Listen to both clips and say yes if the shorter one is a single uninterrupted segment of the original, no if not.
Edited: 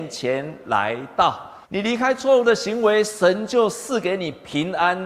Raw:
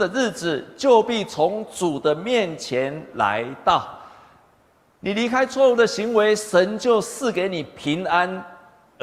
no